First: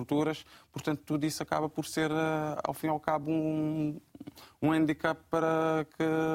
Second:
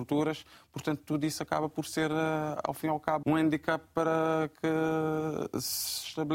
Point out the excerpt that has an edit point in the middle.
second; 1 cut; at 3.2 s

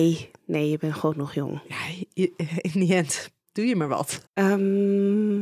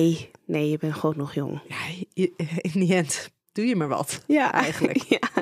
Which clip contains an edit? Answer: first; 1 cut; at 4.3 s

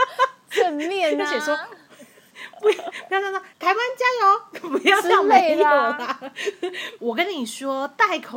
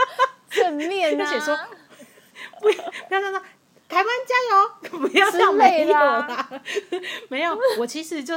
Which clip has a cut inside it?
first; 2 cuts; at 3.5 s, 7.0 s

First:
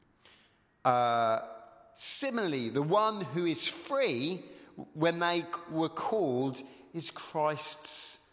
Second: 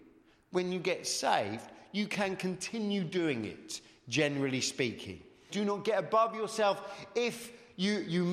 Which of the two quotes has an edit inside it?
second; 1 cut; at 5.5 s

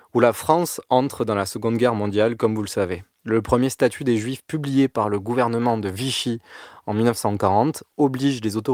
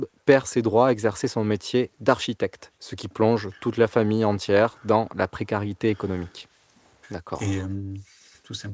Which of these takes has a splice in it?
second; 1 cut; at 7.0 s

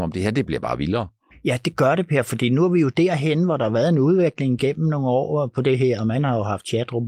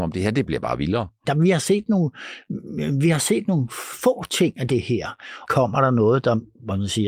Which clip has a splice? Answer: second; 2 cuts; at 1.2 s, 5.5 s

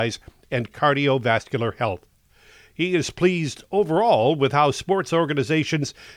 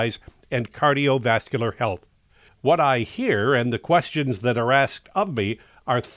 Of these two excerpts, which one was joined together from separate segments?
second; 1 cut; at 2.5 s

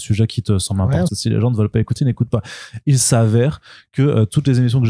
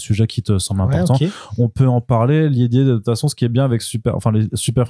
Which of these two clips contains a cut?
first; 1 cut; at 1.1 s

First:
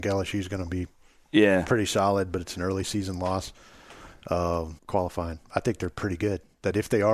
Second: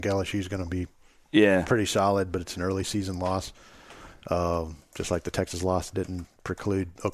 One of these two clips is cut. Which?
first; 1 cut; at 4.8 s

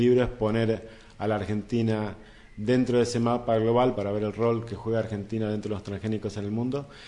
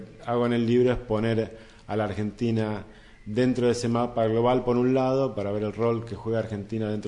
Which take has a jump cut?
first; 1 cut; at 3.9 s

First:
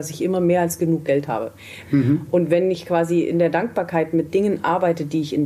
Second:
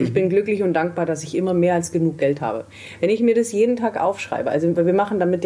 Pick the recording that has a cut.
first; 1 cut; at 1.8 s

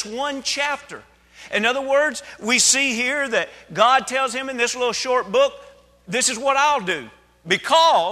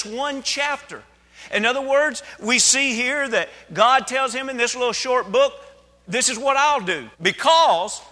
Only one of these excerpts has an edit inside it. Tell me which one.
second; 1 cut; at 7.1 s

